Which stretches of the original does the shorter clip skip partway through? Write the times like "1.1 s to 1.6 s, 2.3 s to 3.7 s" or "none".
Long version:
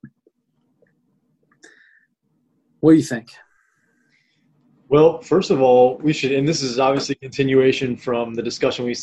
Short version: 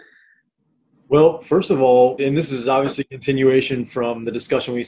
2.6 s to 4.7 s, 6.0 s to 6.3 s